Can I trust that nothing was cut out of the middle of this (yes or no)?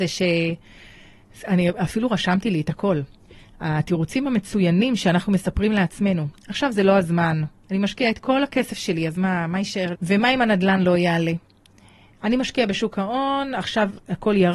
no